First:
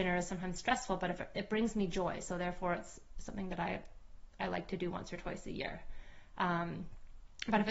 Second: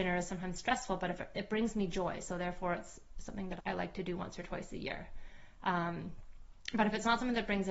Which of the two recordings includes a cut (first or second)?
second